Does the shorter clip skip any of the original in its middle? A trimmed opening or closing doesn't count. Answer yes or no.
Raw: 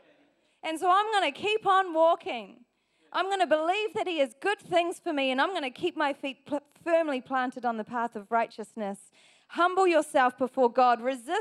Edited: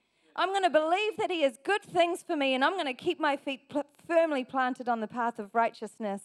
no